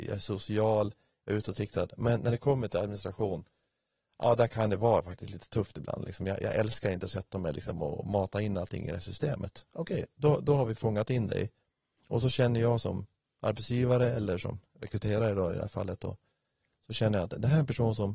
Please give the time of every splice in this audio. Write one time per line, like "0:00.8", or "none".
none